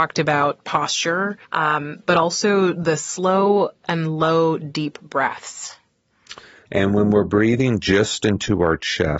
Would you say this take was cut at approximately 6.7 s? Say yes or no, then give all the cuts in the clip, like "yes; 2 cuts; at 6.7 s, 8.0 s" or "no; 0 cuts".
yes; 2 cuts; at 1.4 s, 6.7 s